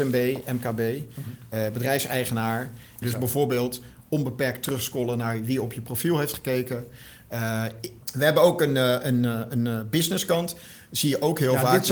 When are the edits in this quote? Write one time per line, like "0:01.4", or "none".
0:03.0
0:08.0